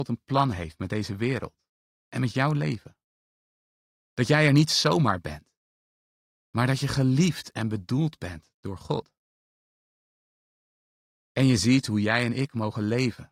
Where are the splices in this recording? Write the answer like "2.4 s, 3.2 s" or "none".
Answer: none